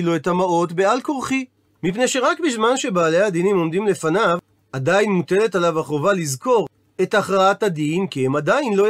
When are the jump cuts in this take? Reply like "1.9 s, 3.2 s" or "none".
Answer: 1.6 s